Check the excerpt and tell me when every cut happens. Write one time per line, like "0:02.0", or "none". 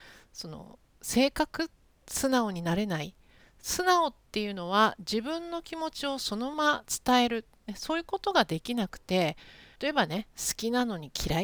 0:06.5
0:09.8

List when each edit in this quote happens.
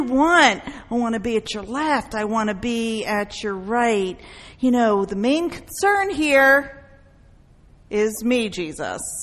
none

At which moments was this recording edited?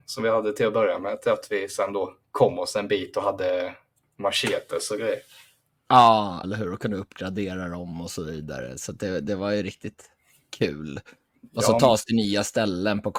0:06.4

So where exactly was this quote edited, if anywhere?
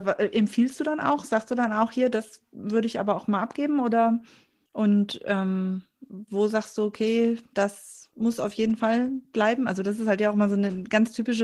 0:04.7

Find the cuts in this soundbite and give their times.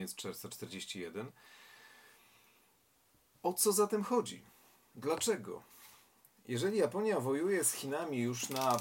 none

